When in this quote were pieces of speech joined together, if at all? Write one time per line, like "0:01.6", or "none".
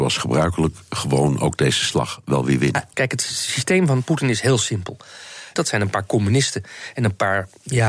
0:02.9
0:05.6